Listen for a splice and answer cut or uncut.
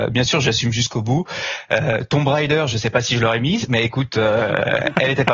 uncut